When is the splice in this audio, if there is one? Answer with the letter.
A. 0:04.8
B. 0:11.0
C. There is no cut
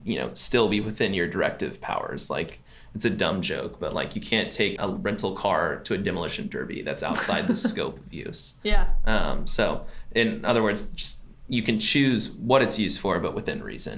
A